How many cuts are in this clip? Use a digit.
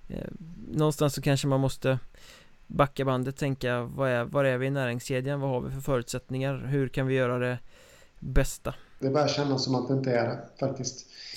1